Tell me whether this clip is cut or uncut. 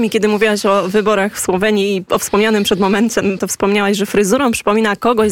cut